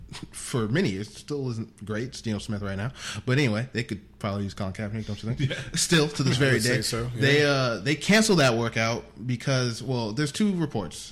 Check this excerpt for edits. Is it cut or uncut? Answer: uncut